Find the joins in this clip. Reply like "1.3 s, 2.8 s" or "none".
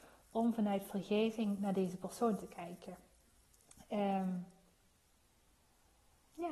3.7 s